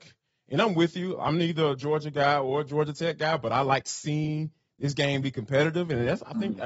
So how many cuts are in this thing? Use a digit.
0